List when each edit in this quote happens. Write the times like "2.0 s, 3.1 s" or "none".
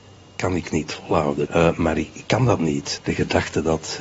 1.5 s, 3.0 s